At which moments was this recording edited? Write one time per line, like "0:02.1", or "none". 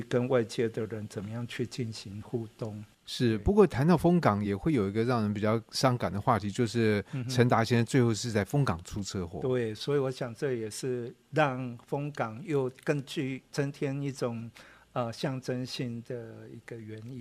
none